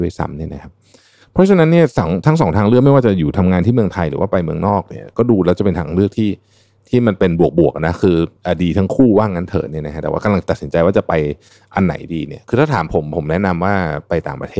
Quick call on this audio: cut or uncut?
cut